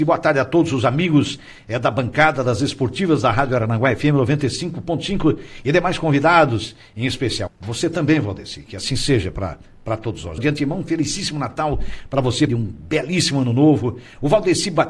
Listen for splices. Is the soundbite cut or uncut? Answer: cut